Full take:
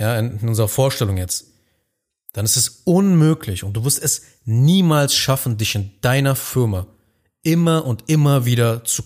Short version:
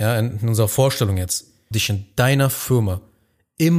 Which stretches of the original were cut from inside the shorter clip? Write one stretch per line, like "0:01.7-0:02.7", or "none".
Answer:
0:01.7-0:05.6